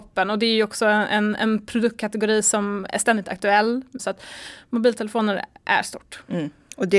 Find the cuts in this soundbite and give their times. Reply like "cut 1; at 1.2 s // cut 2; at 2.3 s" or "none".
cut 1; at 4.0 s